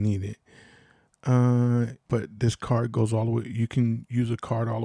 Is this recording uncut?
no; 1 cut; at 2.1 s

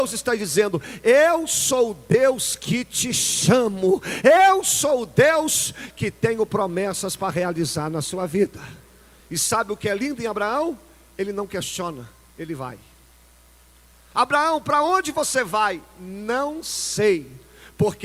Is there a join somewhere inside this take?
yes; 1 cut; at 9.2 s

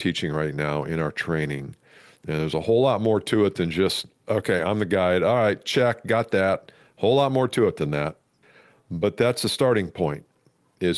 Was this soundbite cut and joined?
no; 0 cuts

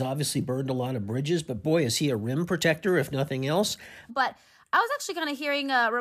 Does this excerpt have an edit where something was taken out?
yes; 1 cut; at 4.1 s

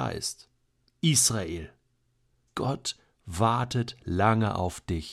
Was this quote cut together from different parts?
yes; 1 cut; at 2.5 s

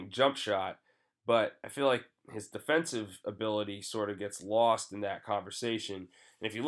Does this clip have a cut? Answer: no; 0 cuts

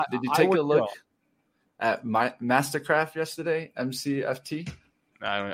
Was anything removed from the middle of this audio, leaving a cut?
no; 0 cuts

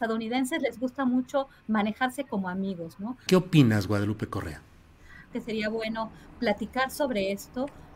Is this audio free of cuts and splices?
no; 2 cuts; at 3.3 s, 5.3 s

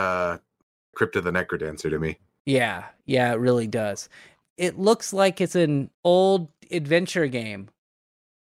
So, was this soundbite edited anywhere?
yes; 3 cuts; at 0.9 s, 4.4 s, 5.9 s

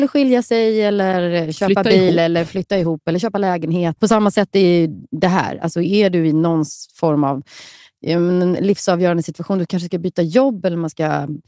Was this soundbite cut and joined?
yes; 1 cut; at 4.0 s

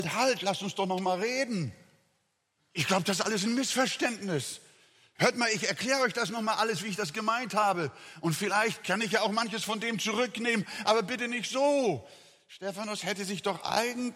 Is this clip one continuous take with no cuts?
yes; 0 cuts

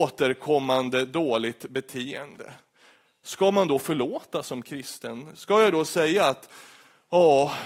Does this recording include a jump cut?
no; 0 cuts

